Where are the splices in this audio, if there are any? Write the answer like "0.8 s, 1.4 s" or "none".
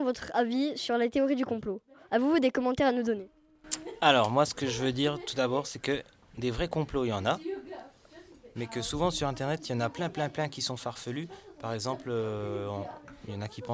none